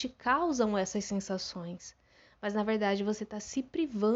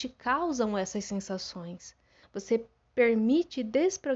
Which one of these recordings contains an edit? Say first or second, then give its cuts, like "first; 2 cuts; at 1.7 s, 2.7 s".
second; 1 cut; at 2.2 s